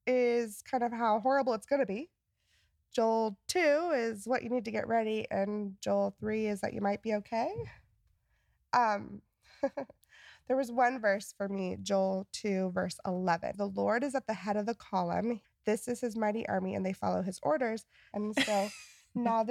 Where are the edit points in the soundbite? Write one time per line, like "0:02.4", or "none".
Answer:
0:13.5
0:15.4
0:18.1